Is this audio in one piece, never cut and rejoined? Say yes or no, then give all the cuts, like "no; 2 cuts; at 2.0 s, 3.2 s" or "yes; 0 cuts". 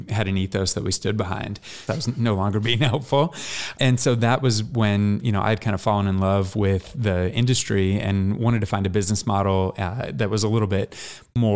no; 2 cuts; at 1.9 s, 3.8 s